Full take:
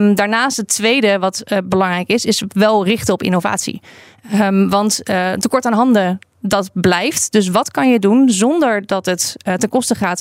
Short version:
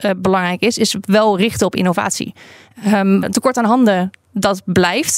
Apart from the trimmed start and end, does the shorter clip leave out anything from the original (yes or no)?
yes